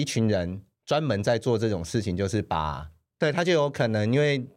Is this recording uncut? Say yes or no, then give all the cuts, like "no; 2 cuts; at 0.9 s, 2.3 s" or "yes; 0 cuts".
no; 1 cut; at 3.2 s